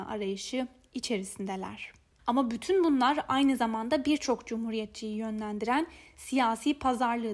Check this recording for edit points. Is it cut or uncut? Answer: cut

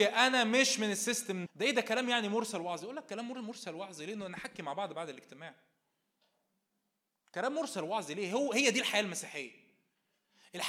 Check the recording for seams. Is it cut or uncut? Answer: cut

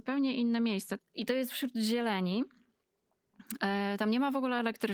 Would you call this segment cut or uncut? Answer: cut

